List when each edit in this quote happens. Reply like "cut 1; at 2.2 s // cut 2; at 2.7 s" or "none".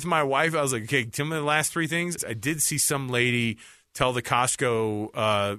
cut 1; at 2.2 s

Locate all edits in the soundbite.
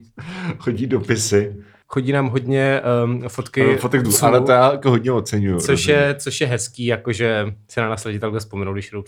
cut 1; at 4.0 s

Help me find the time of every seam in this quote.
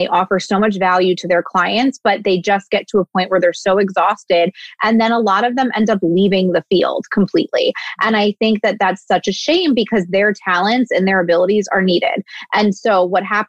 none

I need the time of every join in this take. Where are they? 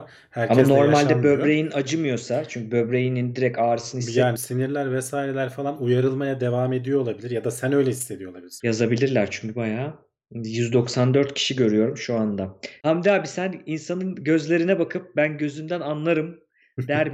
cut 1; at 4.4 s // cut 2; at 8.6 s // cut 3; at 12.8 s

